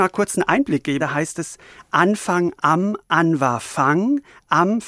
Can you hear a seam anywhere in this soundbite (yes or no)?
yes